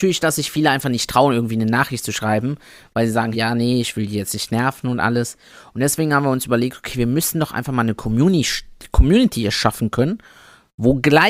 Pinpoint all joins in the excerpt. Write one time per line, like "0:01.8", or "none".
0:03.3